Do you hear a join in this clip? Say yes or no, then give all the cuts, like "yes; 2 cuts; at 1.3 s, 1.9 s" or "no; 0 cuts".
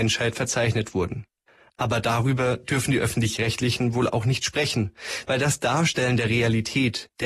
no; 0 cuts